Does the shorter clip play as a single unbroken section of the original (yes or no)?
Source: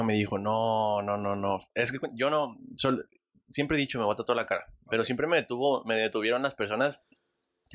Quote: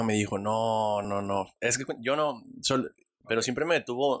no